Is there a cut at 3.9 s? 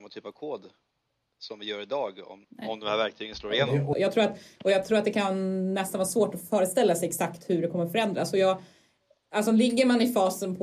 yes; 2 cuts; at 2.4 s, 3.9 s

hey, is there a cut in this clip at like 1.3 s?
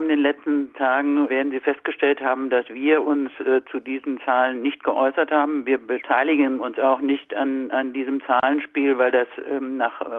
yes; 1 cut; at 1.3 s

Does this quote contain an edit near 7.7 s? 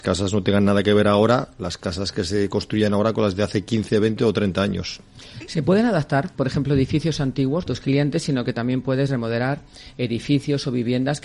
yes; 1 cut; at 7.7 s

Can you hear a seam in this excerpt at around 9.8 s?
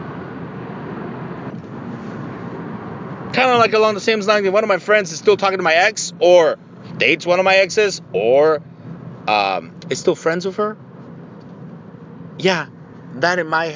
yes; 2 cuts; at 1.5 s, 9.8 s

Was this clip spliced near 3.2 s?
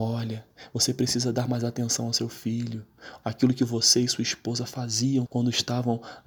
yes; 2 cuts; at 3.2 s, 5.3 s

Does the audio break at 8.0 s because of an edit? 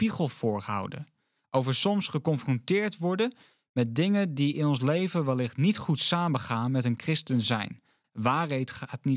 yes; 1 cut; at 8.0 s

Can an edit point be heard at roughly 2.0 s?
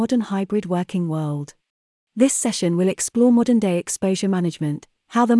yes; 1 cut; at 2.0 s

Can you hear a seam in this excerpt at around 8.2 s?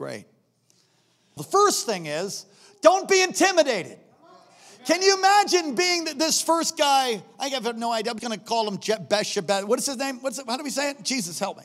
yes; 2 cuts; at 1.4 s, 8.2 s

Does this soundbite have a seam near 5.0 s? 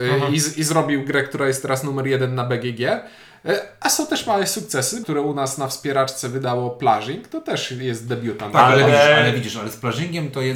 yes; 1 cut; at 5.0 s

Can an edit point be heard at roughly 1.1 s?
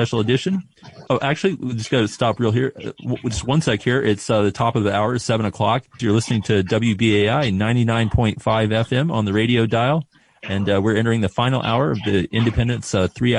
yes; 2 cuts; at 1.1 s, 6.0 s

